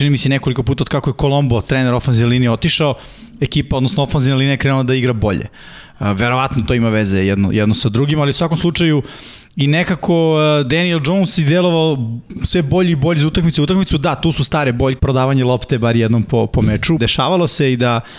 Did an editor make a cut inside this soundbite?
yes; 2 cuts; at 15.0 s, 17.0 s

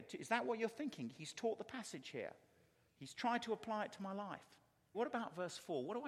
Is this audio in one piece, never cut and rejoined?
no; 1 cut; at 4.9 s

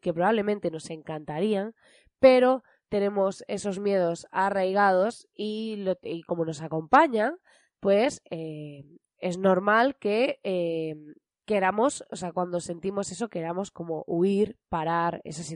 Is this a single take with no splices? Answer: yes; 0 cuts

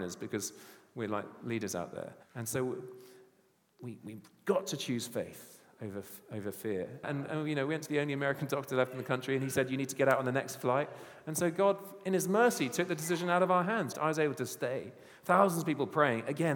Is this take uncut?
no; 3 cuts; at 2.2 s, 7.0 s, 13.9 s

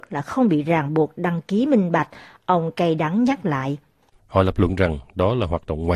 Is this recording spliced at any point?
yes; 1 cut; at 4.2 s

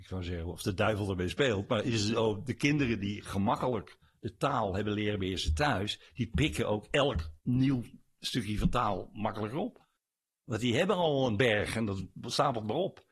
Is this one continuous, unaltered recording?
no; 1 cut; at 7.4 s

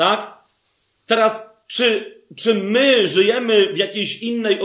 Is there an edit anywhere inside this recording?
no; 0 cuts

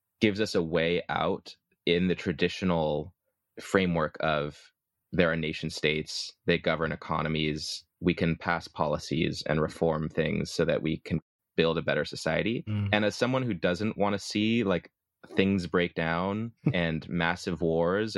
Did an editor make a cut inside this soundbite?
no; 0 cuts

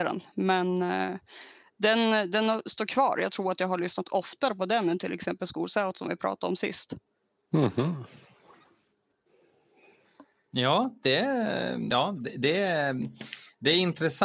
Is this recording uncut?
yes; 0 cuts

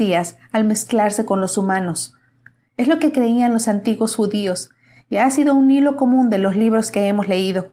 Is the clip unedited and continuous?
yes; 0 cuts

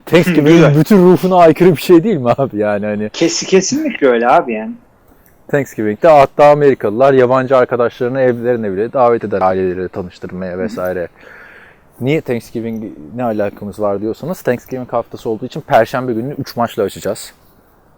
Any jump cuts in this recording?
no; 0 cuts

